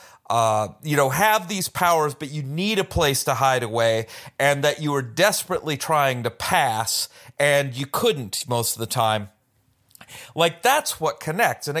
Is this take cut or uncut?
uncut